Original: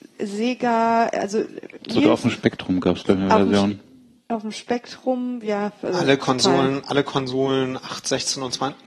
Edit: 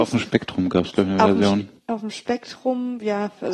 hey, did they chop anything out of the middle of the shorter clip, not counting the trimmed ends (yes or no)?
yes